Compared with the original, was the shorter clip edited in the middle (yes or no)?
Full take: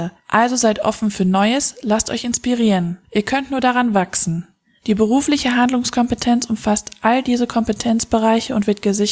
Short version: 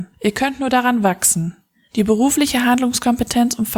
no